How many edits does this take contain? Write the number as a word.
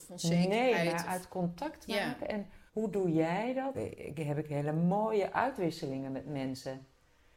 two